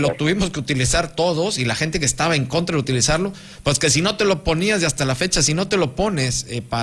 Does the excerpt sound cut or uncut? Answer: uncut